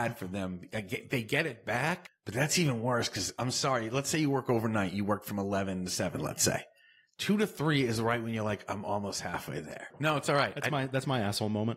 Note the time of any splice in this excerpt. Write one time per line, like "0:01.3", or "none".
0:09.9